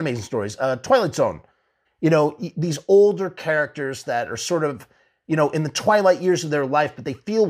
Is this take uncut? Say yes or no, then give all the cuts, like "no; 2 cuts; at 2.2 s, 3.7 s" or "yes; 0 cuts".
no; 1 cut; at 1.9 s